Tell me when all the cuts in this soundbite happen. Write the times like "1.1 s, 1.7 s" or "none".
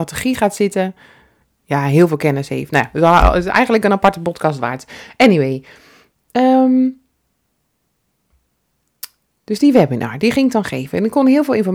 none